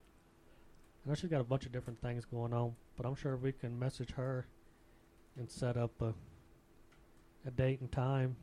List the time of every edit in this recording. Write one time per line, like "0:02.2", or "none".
0:01.0

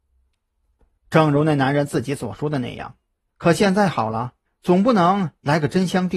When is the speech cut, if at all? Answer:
0:01.0
0:03.3
0:04.5

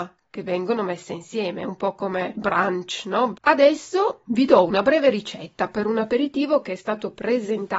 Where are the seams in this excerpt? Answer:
0:03.3

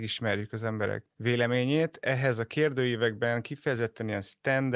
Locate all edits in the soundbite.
0:01.1

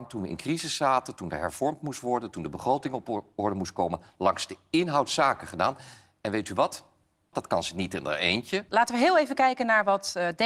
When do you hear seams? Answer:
0:07.3
0:08.7

